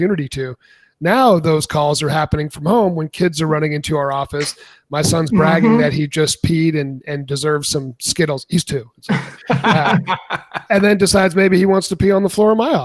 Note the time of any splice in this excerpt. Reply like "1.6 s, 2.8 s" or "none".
none